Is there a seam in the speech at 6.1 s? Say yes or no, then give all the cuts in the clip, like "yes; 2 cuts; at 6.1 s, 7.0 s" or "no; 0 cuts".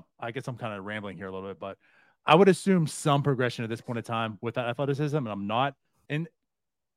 yes; 1 cut; at 6.1 s